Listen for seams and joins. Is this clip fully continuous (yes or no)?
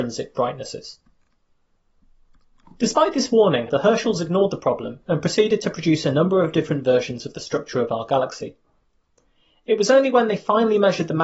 no